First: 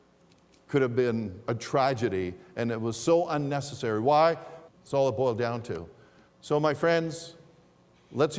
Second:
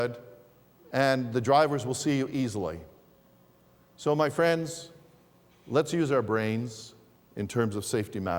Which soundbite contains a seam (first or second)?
first